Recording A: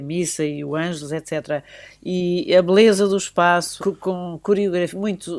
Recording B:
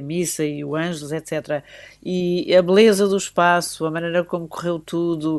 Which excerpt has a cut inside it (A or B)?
A